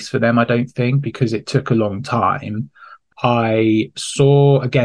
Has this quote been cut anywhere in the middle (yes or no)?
no